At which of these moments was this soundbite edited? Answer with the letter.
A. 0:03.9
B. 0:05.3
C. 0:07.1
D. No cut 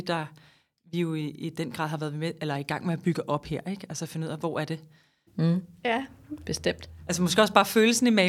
B